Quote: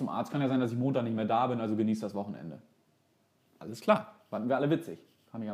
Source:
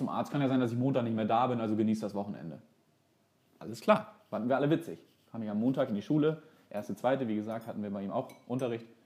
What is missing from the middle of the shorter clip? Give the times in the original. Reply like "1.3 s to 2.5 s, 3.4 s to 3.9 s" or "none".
none

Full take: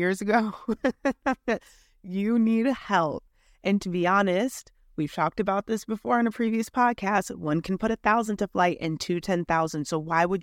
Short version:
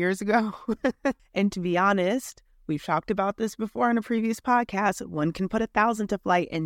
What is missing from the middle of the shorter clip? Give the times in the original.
1.2 s to 3.5 s

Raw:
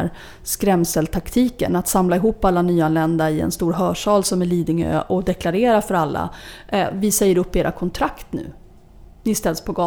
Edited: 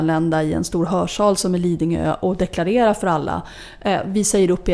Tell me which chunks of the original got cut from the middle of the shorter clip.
none

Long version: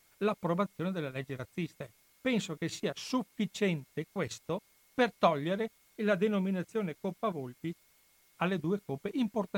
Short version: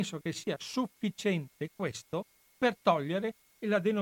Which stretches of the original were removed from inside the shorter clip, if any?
none

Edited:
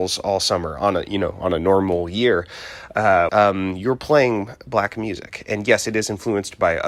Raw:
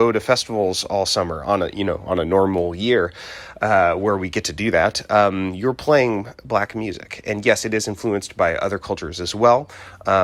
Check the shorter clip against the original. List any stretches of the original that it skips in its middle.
3.9 s to 5.1 s

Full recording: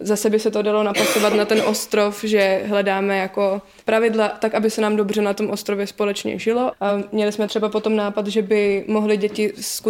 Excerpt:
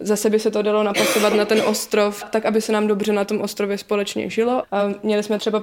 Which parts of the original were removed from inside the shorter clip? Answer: 2.2 s to 4.3 s

